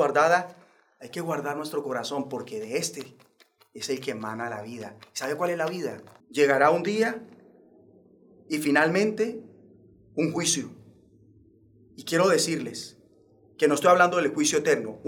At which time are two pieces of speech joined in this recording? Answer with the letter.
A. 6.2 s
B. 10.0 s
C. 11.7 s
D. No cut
A